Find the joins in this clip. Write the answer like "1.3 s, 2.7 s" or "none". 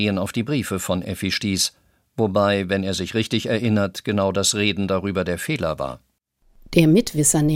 none

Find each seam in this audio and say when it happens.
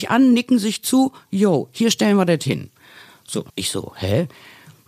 3.5 s

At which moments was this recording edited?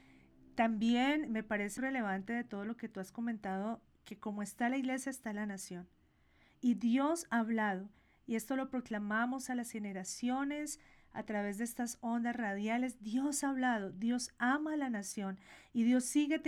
1.8 s

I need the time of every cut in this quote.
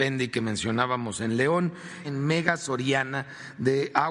2.0 s

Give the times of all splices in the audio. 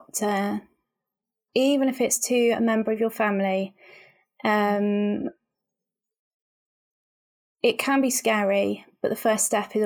1.5 s

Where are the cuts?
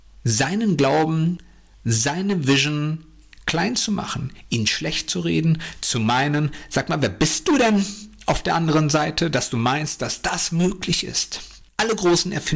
none

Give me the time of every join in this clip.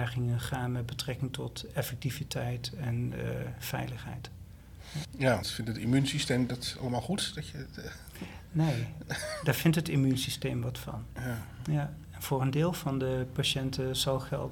5.4 s

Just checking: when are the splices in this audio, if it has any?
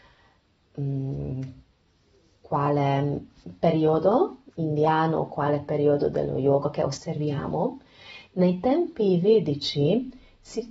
4.5 s

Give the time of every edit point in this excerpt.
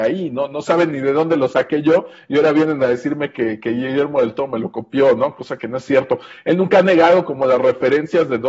none

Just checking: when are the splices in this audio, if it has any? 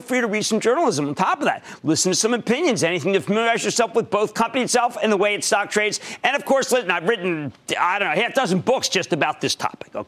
none

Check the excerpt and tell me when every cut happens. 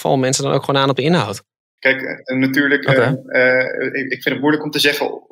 1.8 s

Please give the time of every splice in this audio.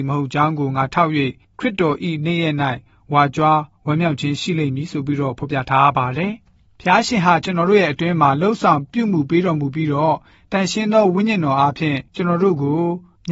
12.1 s

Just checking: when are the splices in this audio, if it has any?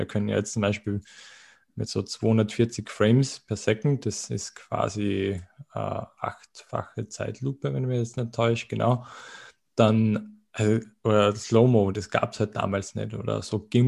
11.9 s

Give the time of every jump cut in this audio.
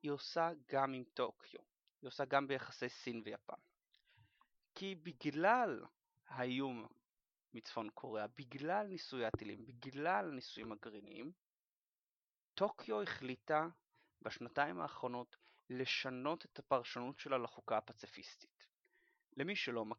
none

